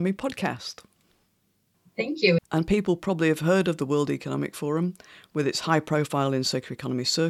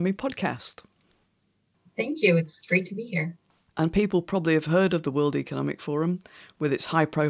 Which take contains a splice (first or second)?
first